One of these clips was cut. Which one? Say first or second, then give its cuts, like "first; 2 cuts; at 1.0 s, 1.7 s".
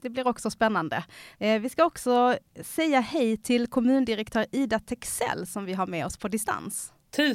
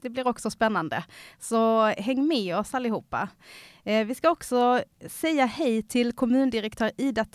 first; 1 cut; at 1.4 s